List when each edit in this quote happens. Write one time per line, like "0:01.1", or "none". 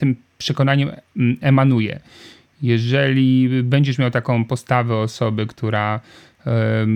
none

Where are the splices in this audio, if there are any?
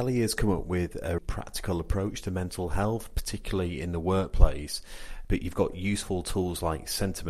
0:01.2
0:05.2

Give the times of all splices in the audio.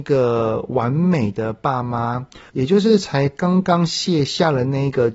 0:02.5

